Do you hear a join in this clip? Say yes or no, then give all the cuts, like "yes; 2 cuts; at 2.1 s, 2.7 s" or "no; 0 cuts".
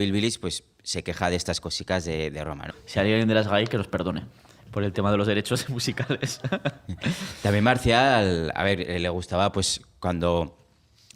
yes; 1 cut; at 2.7 s